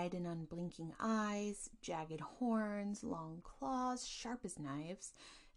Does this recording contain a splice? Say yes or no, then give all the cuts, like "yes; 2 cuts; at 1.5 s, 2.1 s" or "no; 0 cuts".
no; 0 cuts